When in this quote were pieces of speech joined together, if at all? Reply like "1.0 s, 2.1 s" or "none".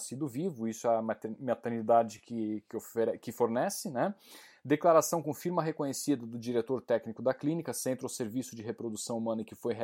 none